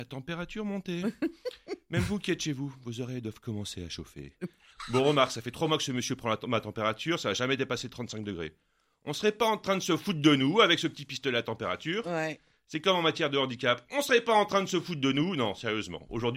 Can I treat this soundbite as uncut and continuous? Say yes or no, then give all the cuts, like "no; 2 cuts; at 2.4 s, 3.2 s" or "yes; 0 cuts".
yes; 0 cuts